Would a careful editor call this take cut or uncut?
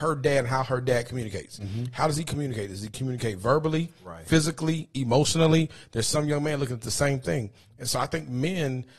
uncut